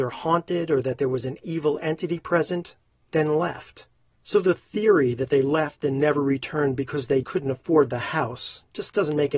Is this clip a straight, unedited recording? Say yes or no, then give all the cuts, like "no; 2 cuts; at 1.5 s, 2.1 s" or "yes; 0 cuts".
no; 2 cuts; at 4.2 s, 7.2 s